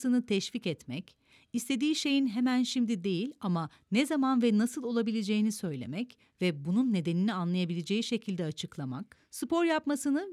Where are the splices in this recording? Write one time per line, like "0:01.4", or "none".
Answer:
none